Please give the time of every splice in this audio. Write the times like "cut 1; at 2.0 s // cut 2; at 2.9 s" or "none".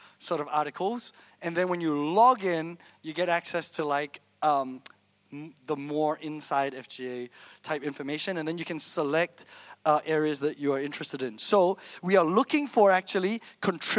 none